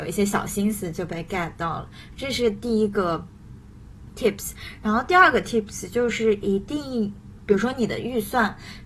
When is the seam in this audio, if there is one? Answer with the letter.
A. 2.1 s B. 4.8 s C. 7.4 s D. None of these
D